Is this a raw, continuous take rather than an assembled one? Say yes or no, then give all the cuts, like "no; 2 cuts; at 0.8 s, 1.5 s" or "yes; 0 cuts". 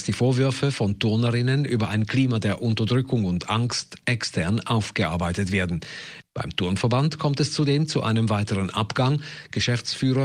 yes; 0 cuts